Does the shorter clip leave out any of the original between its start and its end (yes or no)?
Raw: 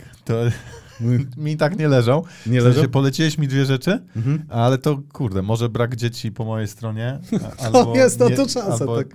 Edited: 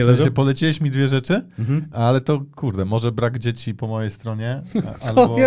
no